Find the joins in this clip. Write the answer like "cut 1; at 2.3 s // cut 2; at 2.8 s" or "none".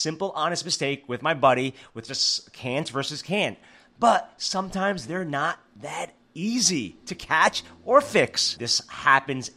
cut 1; at 8.6 s